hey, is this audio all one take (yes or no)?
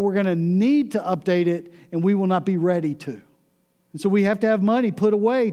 no